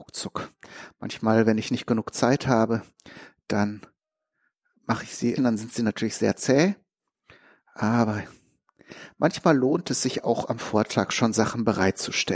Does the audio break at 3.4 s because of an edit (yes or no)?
no